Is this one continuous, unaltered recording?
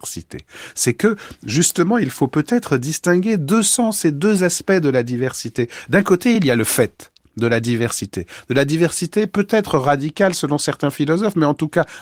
yes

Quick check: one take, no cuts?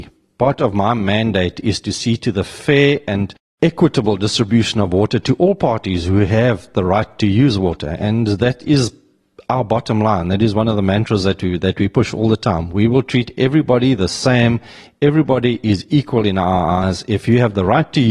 yes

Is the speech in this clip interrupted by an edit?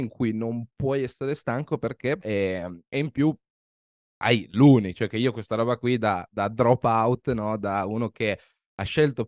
yes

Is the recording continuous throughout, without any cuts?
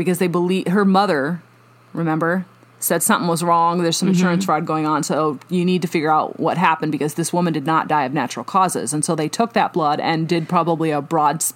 yes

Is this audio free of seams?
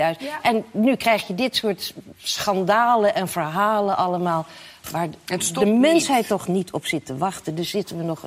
yes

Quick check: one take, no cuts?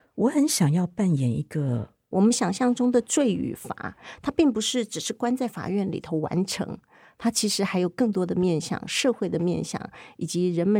no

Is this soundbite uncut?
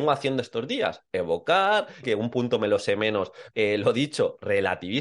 no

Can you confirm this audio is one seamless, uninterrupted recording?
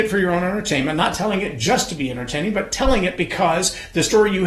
yes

